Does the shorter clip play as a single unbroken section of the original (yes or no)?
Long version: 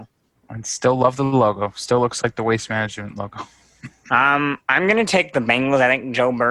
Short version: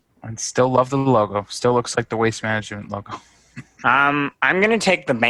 yes